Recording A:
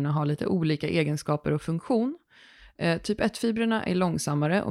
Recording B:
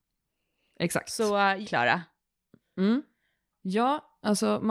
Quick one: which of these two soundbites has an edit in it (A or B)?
B